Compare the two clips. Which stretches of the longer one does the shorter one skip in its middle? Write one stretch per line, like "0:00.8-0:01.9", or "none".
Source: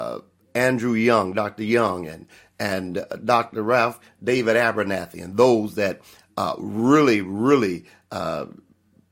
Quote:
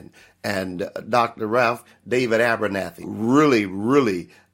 0:05.2-0:06.6